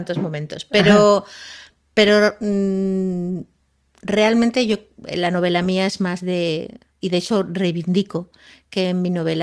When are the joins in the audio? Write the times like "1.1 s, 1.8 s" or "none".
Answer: none